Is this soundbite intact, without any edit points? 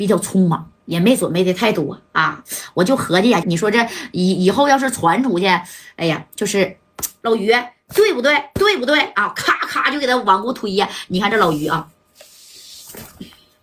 no; 2 cuts; at 3.4 s, 7.2 s

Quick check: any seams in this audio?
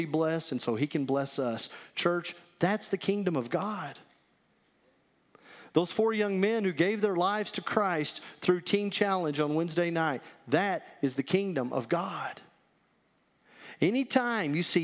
no; 0 cuts

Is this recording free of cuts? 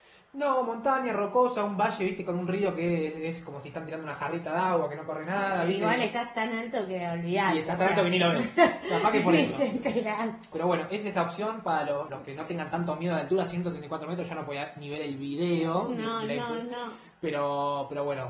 no; 2 cuts; at 10.5 s, 12.1 s

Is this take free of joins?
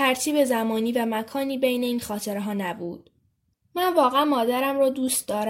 no; 1 cut; at 3.5 s

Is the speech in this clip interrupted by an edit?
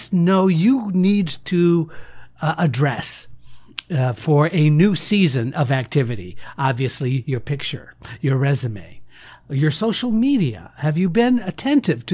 no; 0 cuts

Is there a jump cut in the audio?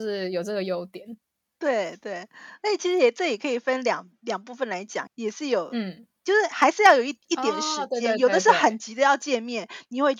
yes; 1 cut; at 5.1 s

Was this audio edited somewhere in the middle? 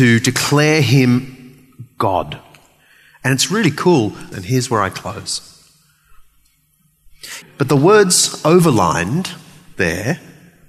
yes; 2 cuts; at 4.3 s, 7.4 s

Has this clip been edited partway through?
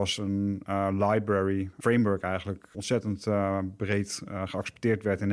yes; 1 cut; at 2.7 s

